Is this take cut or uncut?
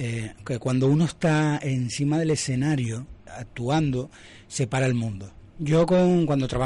cut